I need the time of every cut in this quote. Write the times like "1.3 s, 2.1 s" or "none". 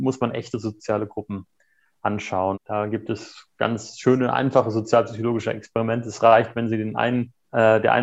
2.5 s